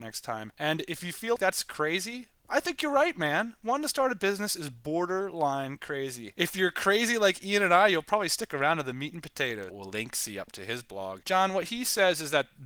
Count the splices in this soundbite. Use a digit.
3